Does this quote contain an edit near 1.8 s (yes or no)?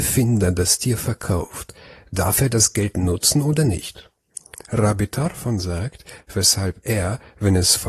no